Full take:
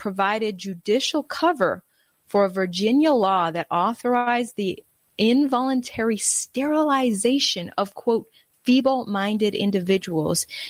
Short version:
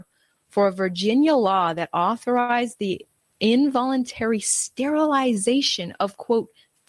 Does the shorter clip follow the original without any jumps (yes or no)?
yes